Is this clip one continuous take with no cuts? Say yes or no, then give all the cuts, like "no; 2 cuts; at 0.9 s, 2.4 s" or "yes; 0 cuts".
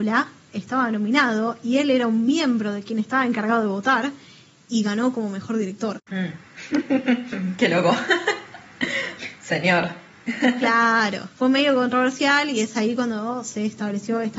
no; 2 cuts; at 7.3 s, 9.2 s